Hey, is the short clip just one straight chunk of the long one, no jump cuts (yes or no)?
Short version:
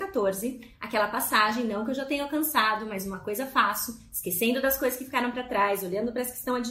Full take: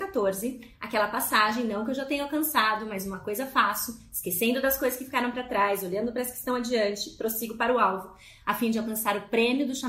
yes